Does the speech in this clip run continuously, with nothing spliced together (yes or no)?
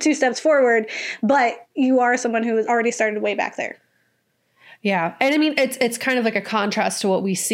no